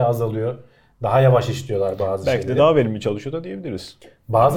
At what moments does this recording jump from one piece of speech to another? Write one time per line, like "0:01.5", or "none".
none